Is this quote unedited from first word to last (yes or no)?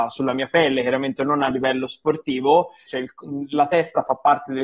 no